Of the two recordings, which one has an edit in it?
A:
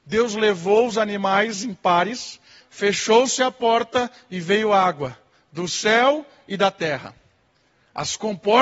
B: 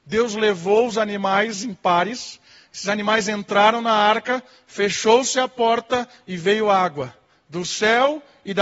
A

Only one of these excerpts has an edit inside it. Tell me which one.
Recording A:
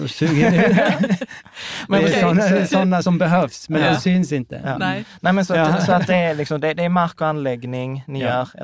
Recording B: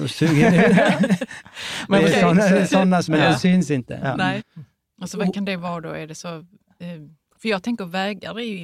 B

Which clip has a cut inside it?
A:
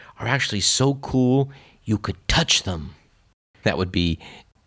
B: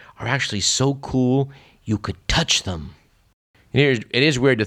A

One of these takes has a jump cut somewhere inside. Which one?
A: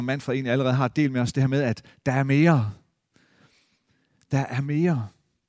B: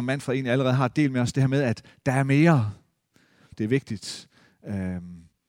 B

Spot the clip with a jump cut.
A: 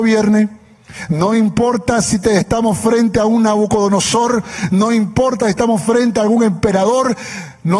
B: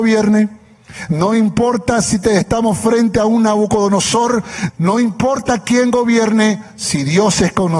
B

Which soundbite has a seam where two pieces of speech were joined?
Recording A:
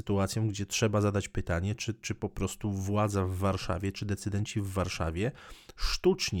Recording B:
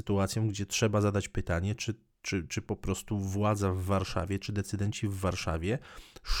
A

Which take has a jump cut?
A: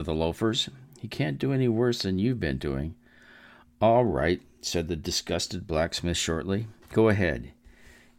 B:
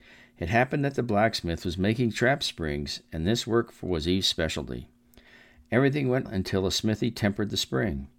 B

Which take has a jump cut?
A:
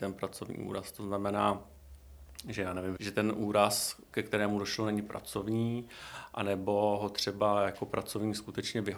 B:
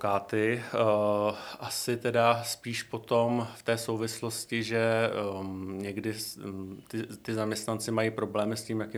A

